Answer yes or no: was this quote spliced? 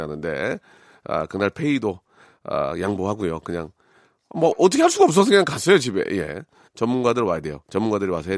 yes